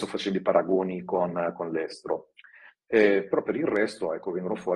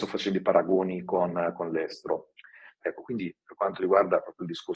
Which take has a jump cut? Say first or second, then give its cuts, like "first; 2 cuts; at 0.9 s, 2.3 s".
second; 1 cut; at 2.8 s